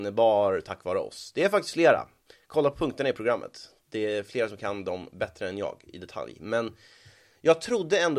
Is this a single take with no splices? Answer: yes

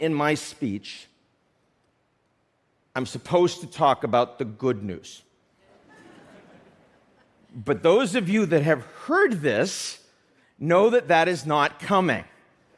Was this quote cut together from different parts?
no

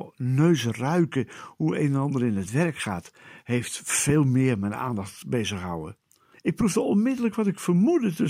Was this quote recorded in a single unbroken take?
no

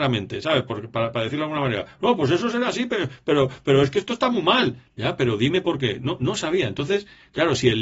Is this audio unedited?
yes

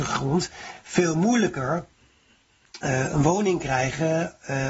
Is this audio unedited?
yes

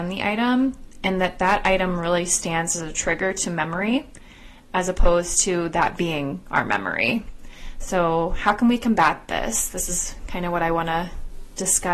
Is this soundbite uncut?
yes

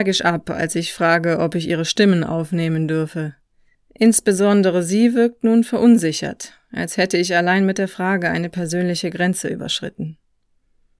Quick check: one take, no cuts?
no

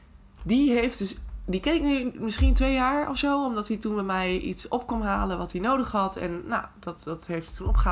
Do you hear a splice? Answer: no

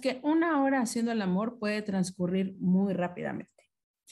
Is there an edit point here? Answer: no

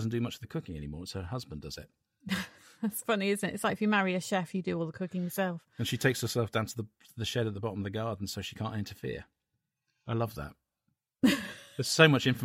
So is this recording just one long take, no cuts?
yes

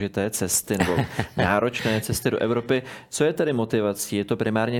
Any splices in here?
no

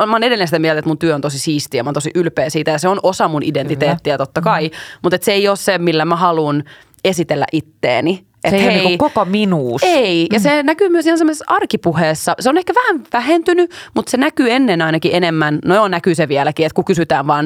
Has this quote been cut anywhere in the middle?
no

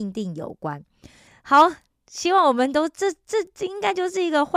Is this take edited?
yes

